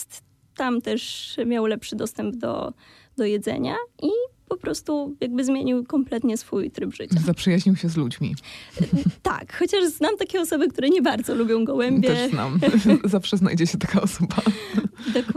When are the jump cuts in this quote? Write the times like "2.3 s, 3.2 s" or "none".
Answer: none